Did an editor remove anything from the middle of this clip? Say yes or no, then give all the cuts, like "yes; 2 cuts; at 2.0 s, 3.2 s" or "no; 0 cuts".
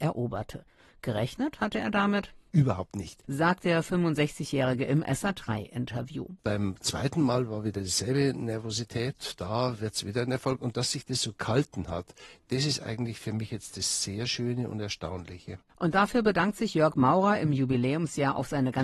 no; 0 cuts